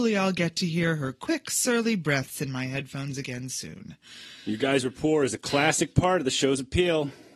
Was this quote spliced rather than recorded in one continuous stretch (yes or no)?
no